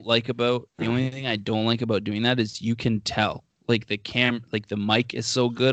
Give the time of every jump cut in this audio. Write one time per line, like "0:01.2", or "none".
none